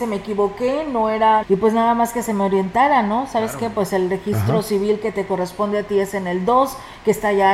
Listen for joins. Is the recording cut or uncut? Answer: cut